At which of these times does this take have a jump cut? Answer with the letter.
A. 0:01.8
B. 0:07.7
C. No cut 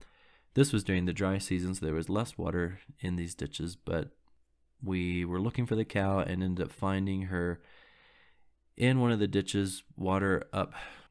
C